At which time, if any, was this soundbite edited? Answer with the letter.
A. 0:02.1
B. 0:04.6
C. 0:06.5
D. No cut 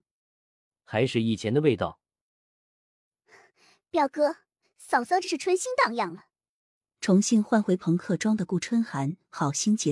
B